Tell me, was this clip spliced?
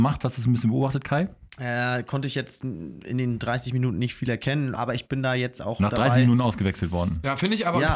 yes; 1 cut; at 4.8 s

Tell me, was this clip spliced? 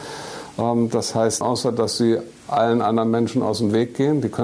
yes; 1 cut; at 1.4 s

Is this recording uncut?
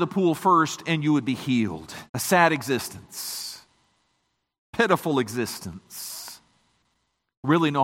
no; 1 cut; at 2.1 s

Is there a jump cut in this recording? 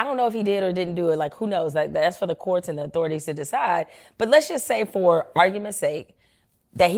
no; 0 cuts

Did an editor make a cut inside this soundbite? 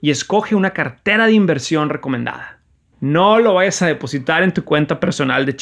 yes; 1 cut; at 2.9 s

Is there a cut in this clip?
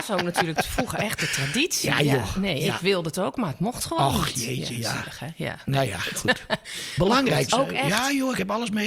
yes; 1 cut; at 7.5 s

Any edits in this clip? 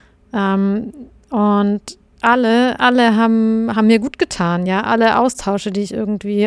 no; 0 cuts

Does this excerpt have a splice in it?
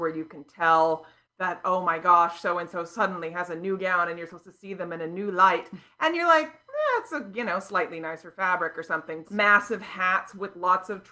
yes; 1 cut; at 9.2 s

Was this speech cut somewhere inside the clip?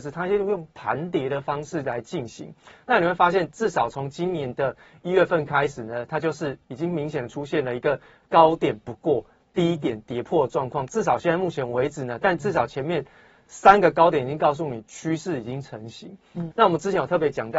yes; 2 cuts; at 12.2 s, 16.5 s

